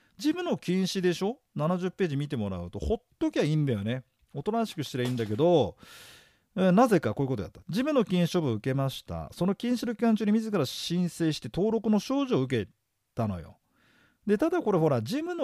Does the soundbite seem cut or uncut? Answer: uncut